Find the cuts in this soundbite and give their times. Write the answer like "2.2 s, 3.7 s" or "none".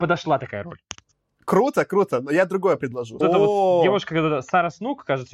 3.2 s